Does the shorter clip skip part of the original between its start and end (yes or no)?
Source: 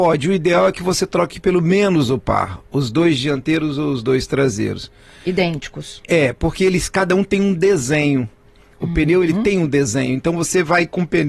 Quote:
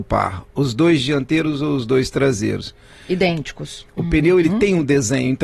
yes